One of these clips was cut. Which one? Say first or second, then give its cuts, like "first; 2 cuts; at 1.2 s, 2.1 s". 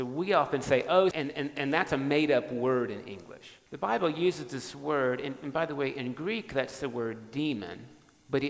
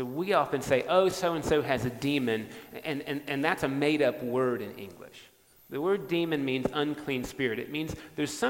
first; 2 cuts; at 1.1 s, 3.7 s